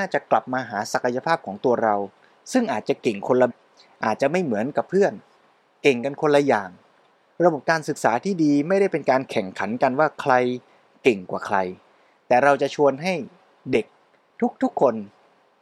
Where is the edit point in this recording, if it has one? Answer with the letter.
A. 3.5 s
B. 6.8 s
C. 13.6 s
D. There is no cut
A